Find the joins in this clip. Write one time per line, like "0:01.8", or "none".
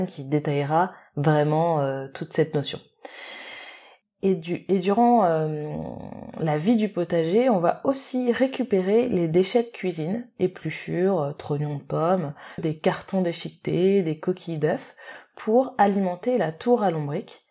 0:04.0
0:12.6